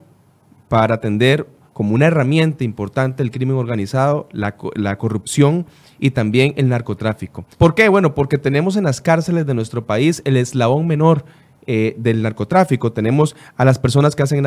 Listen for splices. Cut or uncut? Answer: cut